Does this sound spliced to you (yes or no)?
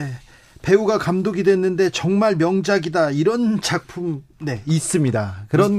no